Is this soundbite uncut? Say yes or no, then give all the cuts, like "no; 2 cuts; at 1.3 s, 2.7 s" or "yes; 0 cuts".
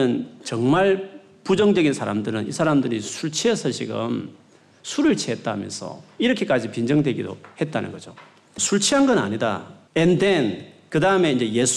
no; 2 cuts; at 8.6 s, 9.9 s